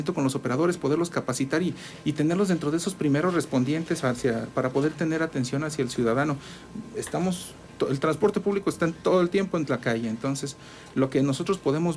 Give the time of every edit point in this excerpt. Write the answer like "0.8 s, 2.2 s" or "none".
none

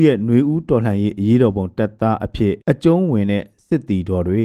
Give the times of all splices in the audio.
2.6 s

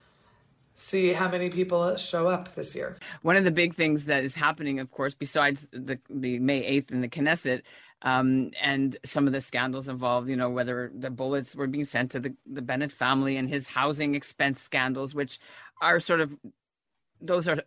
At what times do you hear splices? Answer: none

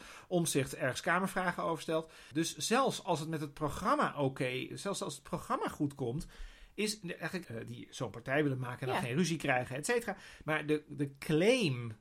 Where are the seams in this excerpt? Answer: 2.3 s, 7.4 s, 10.4 s

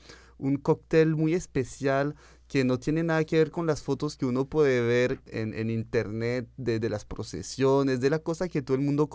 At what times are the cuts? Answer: none

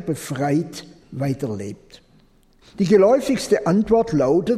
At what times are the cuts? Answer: 2.6 s

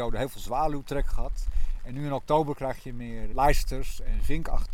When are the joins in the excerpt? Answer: 3.3 s

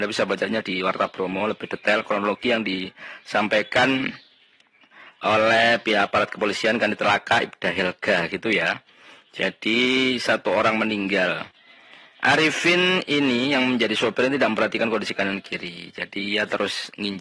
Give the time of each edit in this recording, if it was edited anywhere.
none

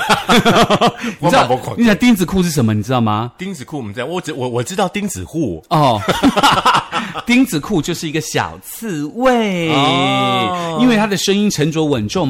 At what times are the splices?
none

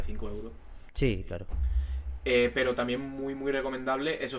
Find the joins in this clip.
none

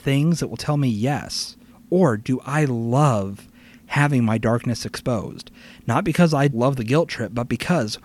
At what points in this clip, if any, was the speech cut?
6.5 s

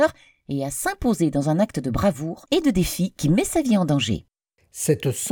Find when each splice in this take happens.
none

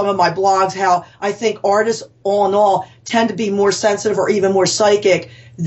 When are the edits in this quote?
none

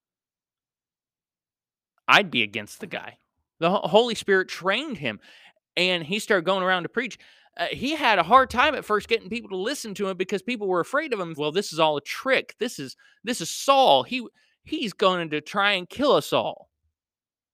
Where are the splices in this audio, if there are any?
3.6 s, 11.4 s

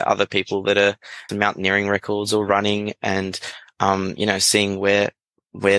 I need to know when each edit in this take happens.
1.3 s

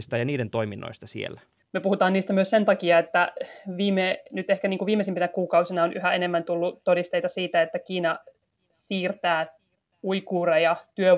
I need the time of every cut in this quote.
1.6 s

